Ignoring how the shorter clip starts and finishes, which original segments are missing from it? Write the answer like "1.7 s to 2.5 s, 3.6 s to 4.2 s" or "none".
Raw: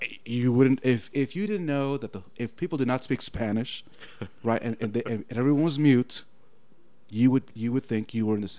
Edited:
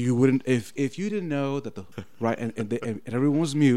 2.3 s to 4.2 s